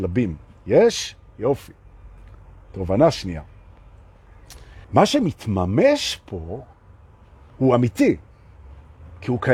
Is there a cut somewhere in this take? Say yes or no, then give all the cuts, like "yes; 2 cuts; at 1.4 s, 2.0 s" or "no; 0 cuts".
yes; 1 cut; at 4.8 s